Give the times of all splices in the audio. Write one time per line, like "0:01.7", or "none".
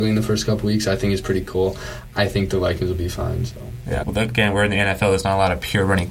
0:04.0